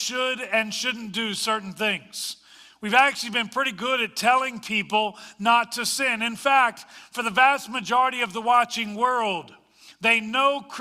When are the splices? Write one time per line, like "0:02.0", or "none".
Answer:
none